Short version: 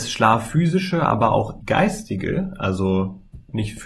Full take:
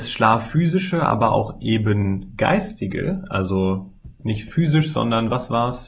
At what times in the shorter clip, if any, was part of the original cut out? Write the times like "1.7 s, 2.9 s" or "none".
1.6 s